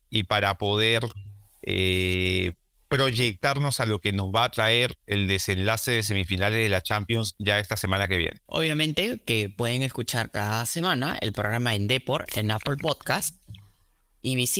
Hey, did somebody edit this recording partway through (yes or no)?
yes